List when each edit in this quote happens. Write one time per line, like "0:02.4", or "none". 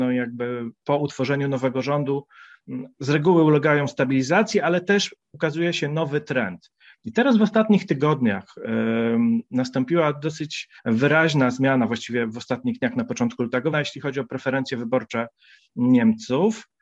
0:10.8
0:13.7